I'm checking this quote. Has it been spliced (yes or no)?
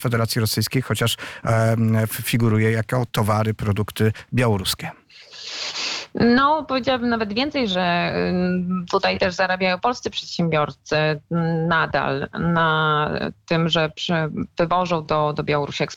no